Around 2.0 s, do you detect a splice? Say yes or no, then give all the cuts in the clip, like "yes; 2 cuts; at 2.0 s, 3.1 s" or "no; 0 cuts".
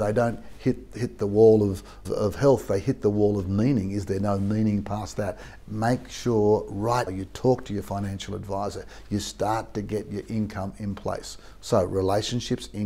yes; 3 cuts; at 2.0 s, 5.6 s, 7.1 s